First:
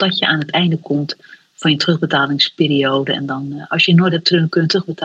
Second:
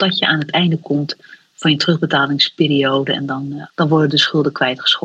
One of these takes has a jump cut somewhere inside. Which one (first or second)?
second